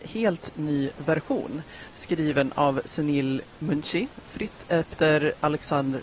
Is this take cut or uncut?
uncut